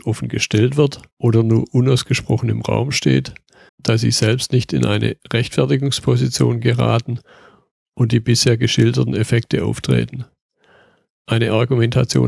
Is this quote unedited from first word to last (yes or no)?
no